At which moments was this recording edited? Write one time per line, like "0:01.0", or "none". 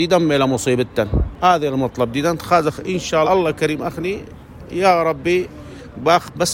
0:03.2